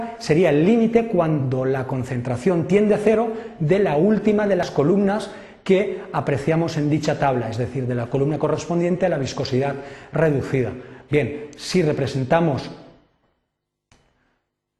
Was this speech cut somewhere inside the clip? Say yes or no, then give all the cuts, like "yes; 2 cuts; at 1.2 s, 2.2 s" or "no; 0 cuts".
no; 0 cuts